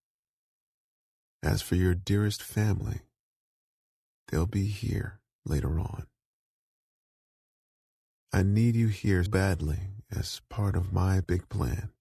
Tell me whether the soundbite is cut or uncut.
cut